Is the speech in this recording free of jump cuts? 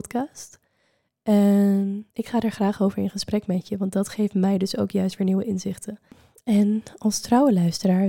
no; 1 cut; at 2.1 s

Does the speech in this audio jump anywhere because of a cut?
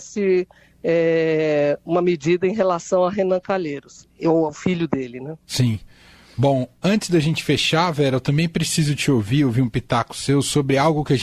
no; 0 cuts

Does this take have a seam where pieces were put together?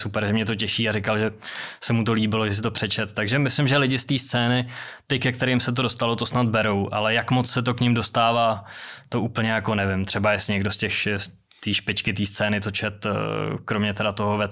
no; 0 cuts

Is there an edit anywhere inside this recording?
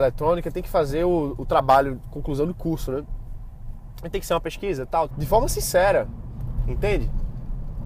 yes; 1 cut; at 5.1 s

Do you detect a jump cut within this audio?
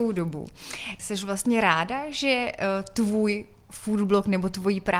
yes; 1 cut; at 1.0 s

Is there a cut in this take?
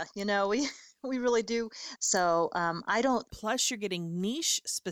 yes; 2 cuts; at 2.0 s, 3.3 s

